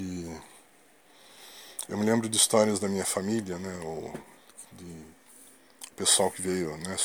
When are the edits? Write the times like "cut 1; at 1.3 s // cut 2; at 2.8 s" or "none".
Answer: none